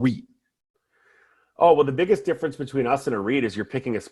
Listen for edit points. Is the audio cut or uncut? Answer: uncut